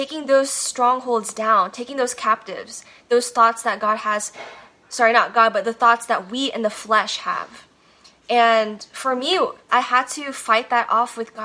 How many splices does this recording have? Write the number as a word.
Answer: one